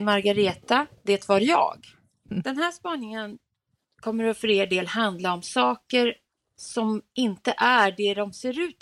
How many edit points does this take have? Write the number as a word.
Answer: one